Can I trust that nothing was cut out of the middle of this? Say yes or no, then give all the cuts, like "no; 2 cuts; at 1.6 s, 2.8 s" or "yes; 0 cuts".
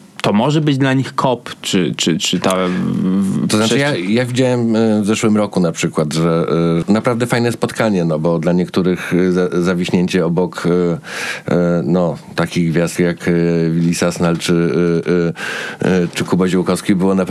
no; 2 cuts; at 6.8 s, 13.0 s